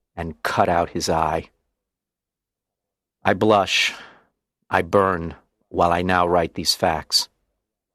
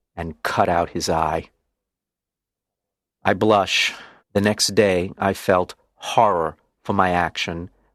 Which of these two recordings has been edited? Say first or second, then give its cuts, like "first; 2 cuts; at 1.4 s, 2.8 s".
second; 1 cut; at 4.2 s